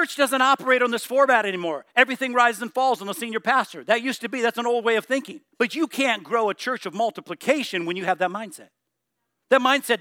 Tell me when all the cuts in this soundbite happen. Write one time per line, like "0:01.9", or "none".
0:05.5

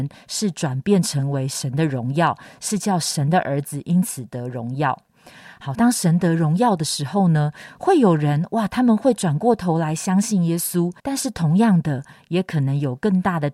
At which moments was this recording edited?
0:05.7
0:11.0

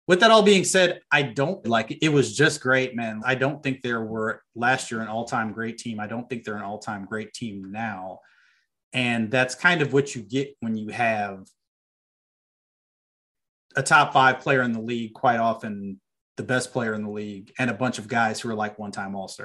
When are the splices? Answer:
0:01.6
0:03.2

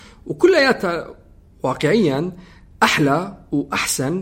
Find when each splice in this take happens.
none

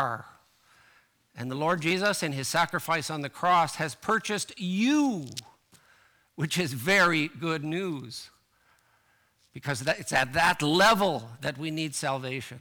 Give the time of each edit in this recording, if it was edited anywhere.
none

